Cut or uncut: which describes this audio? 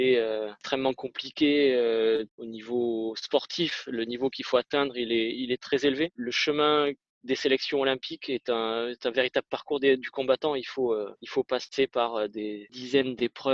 uncut